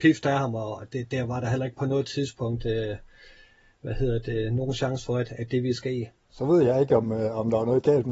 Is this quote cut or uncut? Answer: cut